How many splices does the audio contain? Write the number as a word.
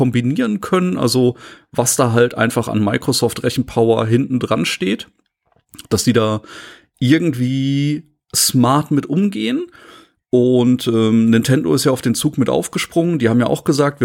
zero